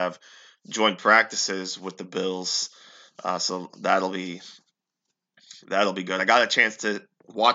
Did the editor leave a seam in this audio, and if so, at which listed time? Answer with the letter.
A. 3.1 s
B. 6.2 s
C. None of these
C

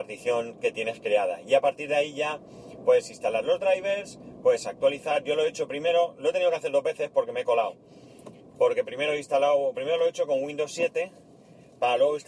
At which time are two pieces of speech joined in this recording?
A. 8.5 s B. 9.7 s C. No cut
B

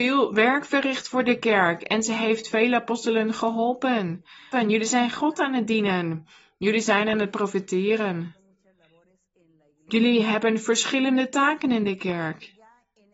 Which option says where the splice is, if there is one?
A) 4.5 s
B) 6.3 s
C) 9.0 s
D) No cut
A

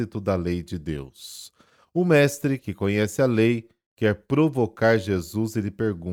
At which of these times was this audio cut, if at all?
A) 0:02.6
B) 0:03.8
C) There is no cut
C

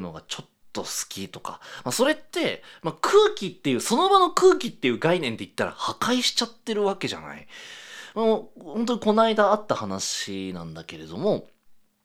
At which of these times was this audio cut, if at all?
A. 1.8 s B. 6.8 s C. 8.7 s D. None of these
D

